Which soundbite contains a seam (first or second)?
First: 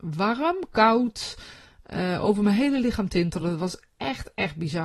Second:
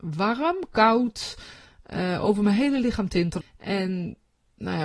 second